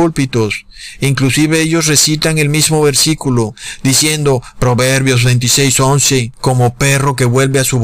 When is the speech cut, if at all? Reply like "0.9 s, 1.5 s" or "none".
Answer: none